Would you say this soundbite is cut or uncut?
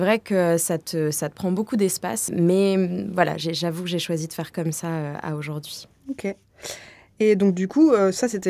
cut